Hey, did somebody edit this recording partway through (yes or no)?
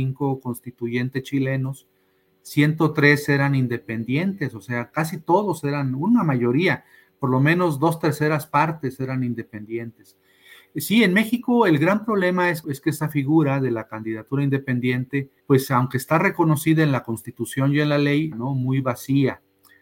yes